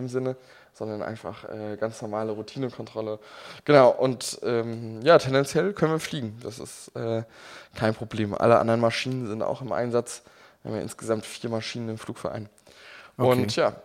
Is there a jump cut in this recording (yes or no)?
no